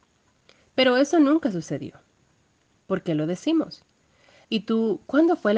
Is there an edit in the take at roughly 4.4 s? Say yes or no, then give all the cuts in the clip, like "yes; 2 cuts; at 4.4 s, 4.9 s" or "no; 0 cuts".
yes; 1 cut; at 4.4 s